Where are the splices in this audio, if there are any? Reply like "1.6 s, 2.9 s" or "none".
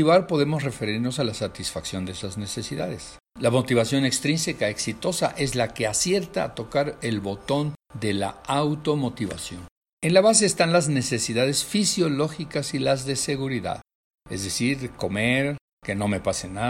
3.2 s, 9.9 s